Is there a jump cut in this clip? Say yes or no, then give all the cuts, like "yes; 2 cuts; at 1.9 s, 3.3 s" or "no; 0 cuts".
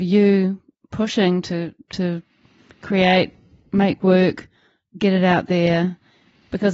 no; 0 cuts